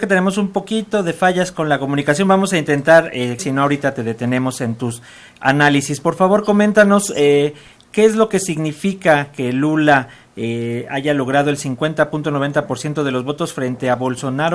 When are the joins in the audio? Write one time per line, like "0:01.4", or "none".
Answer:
0:03.4